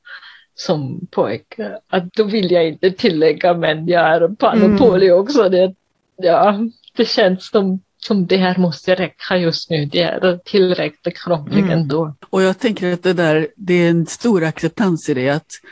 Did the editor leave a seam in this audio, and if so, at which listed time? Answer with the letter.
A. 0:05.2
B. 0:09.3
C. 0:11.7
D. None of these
D